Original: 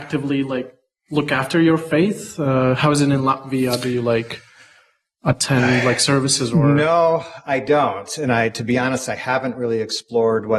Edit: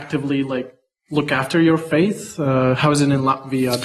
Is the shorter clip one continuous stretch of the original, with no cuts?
yes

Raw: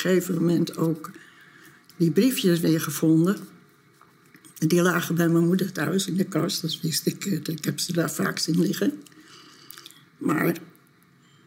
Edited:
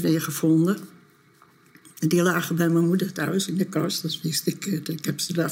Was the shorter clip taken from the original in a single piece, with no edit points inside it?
yes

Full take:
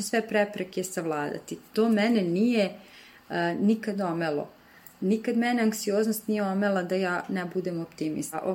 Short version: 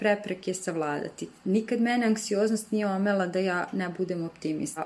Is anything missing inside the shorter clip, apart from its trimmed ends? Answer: yes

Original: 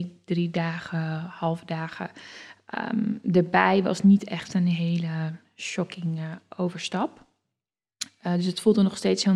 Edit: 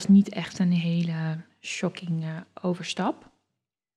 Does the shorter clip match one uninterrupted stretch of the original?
yes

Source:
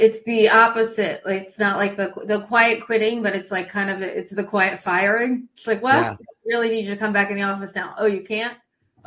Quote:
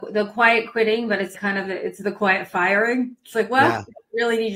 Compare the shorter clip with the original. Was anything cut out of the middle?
yes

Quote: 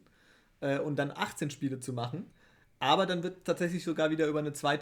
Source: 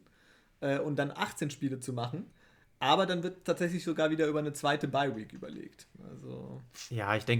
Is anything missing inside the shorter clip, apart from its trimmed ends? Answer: no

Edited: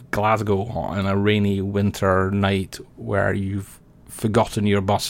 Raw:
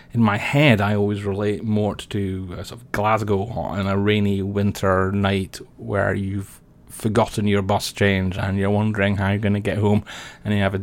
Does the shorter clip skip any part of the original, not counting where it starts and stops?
no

